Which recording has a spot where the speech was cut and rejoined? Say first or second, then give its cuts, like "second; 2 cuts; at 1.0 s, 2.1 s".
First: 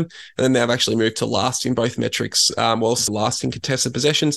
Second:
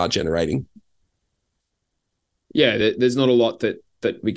first; 1 cut; at 3.1 s